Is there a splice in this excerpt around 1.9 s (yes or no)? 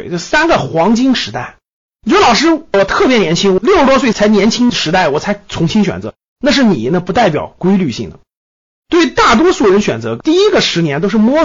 no